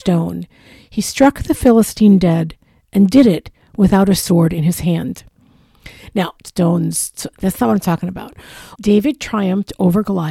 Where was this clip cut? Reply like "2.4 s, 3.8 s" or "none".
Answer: 6.4 s, 8.8 s